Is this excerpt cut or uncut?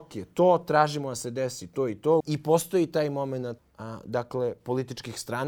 cut